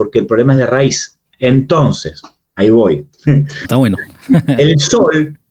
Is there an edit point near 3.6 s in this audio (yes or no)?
yes